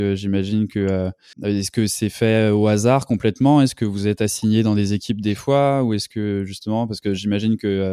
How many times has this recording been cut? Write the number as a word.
one